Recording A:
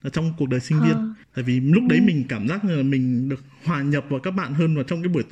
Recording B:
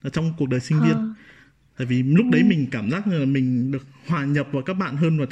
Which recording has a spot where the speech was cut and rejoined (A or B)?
A